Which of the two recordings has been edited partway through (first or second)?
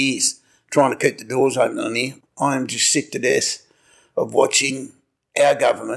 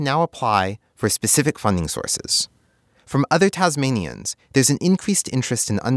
first